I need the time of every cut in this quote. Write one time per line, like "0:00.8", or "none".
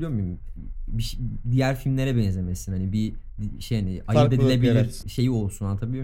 0:05.0